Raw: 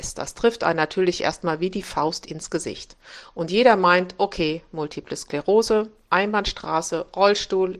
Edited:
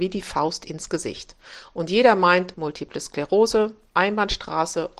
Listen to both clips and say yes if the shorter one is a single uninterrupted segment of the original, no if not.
no